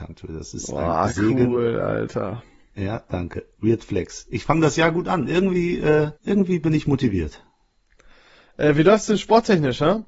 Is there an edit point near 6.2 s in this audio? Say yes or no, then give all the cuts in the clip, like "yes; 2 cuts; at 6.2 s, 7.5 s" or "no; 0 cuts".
yes; 1 cut; at 6.2 s